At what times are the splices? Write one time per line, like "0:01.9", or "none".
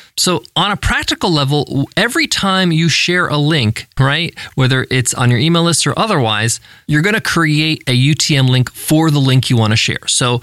0:04.0